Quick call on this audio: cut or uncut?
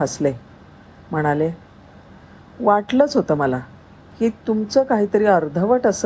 uncut